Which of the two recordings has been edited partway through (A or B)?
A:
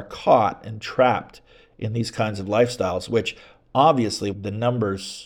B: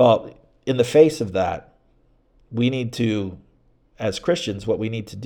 A